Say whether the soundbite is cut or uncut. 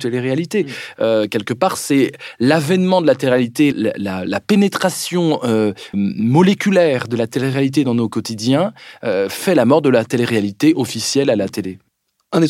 cut